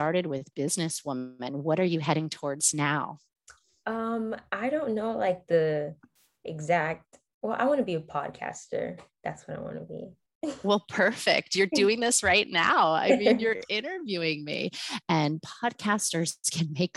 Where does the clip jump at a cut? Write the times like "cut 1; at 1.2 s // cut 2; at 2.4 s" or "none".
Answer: none